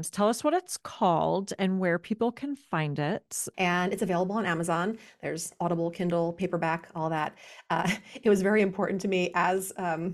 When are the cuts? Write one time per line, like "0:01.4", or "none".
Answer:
0:03.5